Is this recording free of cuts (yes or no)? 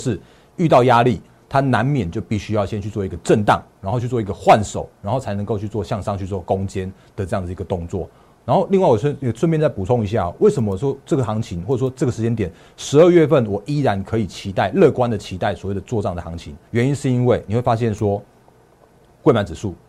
no